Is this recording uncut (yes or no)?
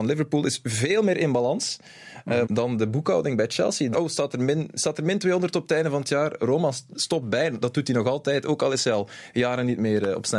no